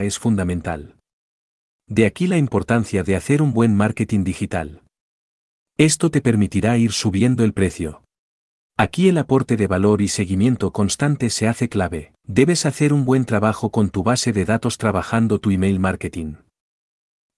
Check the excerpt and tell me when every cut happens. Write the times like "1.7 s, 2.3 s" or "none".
8.7 s, 12.2 s